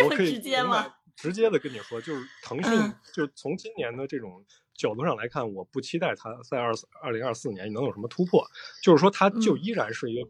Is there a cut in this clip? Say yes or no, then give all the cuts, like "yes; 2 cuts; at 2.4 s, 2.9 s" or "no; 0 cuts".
no; 0 cuts